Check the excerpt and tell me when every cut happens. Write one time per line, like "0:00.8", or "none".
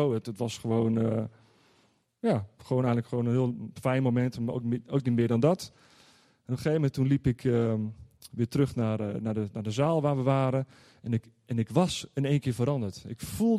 none